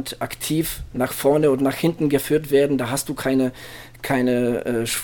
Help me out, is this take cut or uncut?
uncut